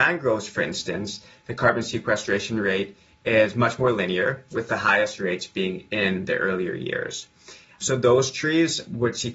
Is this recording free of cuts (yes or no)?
no